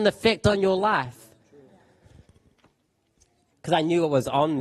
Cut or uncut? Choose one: cut